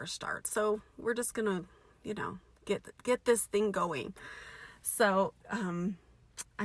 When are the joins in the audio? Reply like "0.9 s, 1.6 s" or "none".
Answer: none